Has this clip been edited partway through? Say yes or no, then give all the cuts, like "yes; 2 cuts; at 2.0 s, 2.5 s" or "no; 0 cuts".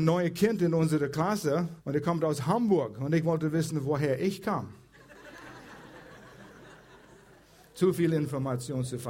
yes; 1 cut; at 1.8 s